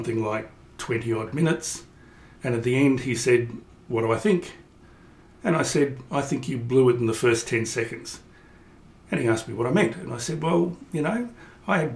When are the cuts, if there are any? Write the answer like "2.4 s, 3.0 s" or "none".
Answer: none